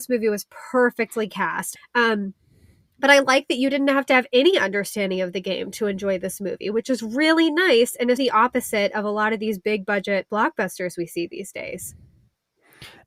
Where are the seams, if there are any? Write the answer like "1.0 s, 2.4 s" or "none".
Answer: 1.8 s, 8.2 s